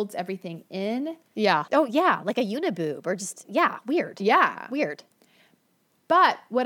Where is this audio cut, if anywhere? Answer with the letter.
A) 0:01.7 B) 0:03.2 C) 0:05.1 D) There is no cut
A